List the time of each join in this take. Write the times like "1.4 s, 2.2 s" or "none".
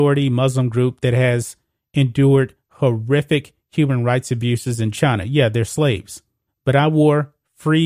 6.5 s